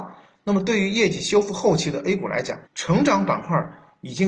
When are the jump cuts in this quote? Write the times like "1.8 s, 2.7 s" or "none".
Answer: 2.7 s